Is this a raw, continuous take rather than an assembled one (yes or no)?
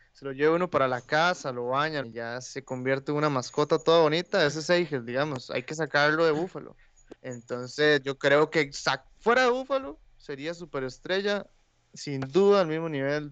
no